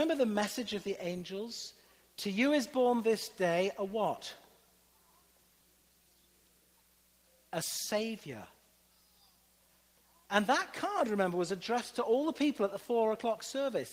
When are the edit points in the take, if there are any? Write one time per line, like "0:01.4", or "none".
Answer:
none